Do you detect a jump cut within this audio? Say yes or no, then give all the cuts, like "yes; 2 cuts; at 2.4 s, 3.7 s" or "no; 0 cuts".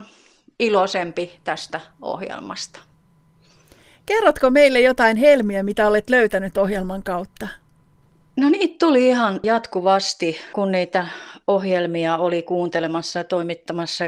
no; 0 cuts